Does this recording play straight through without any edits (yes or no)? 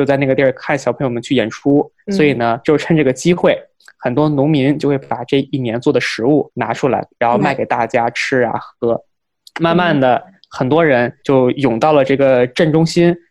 no